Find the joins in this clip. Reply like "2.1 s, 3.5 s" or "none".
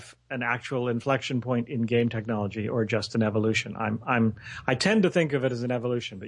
none